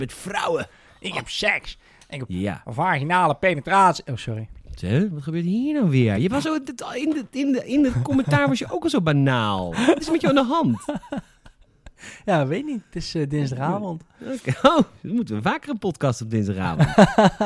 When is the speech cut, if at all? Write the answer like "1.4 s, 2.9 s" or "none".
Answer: none